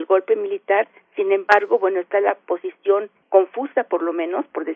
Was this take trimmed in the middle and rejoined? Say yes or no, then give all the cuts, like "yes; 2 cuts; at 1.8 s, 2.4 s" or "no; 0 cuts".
yes; 1 cut; at 3.2 s